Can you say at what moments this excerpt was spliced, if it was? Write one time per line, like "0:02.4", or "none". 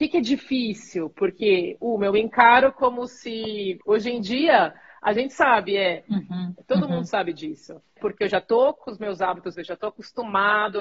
0:03.8
0:08.0
0:09.5